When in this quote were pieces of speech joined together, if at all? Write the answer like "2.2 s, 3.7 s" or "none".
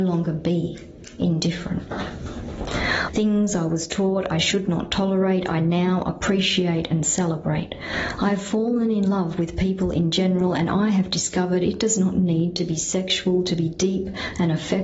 3.1 s